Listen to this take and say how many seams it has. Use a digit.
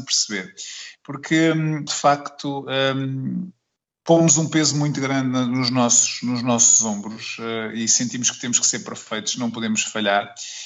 1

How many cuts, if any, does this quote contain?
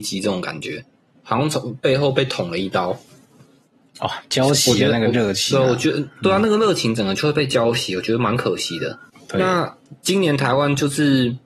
0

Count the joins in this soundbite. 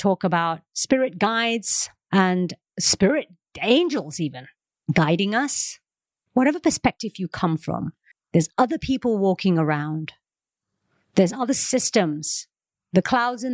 1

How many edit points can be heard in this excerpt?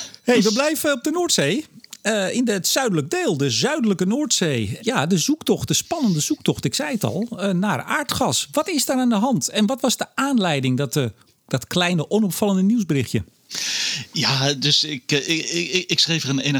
1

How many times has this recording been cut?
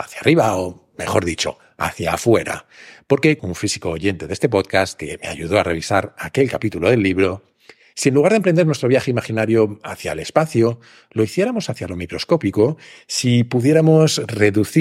1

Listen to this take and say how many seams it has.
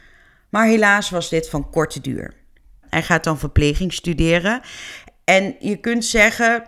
1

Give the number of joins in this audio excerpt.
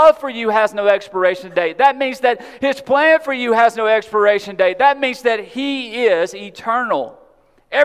0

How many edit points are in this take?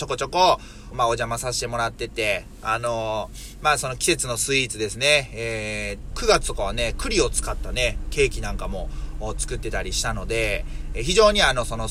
2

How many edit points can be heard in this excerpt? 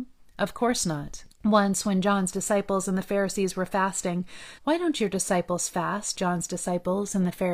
3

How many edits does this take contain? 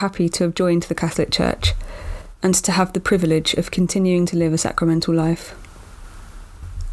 0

